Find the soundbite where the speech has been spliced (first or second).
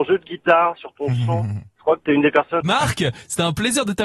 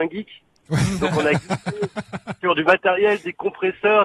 first